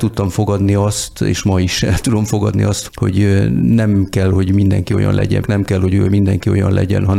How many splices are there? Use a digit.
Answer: 2